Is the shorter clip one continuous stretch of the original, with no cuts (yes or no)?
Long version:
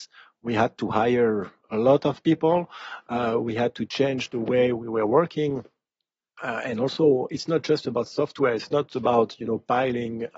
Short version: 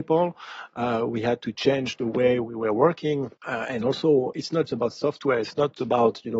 no